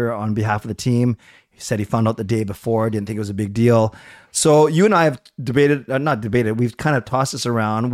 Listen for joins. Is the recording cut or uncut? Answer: uncut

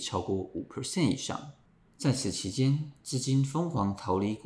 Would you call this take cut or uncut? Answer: uncut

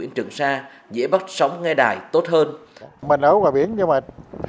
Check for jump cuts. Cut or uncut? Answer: cut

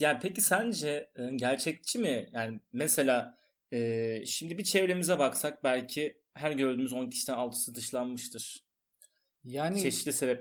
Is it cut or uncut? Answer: uncut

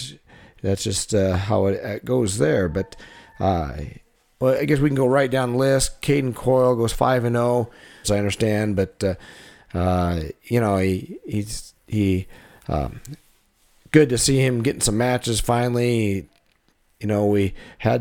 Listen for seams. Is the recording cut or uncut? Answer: cut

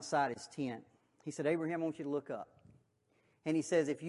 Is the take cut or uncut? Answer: uncut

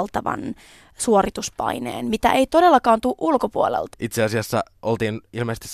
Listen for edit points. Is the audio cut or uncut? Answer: cut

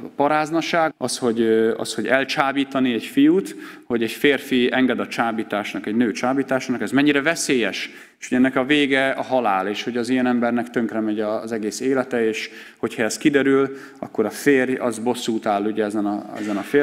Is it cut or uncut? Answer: cut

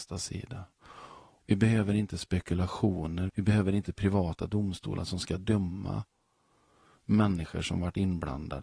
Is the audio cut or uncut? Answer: cut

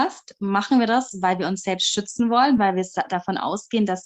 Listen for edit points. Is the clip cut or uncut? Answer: uncut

